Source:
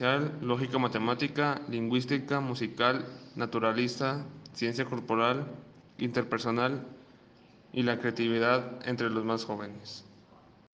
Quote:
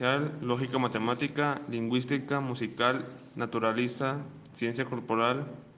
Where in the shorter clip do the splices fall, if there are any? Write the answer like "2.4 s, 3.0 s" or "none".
none